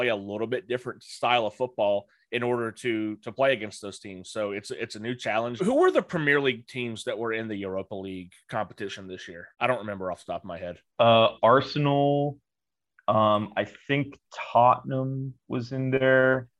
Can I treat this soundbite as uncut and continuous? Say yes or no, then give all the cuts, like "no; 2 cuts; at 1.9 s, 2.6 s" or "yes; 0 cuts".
no; 3 cuts; at 5.6 s, 9.5 s, 10.9 s